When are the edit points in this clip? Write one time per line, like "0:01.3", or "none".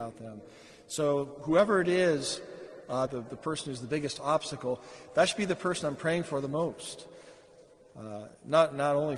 0:03.1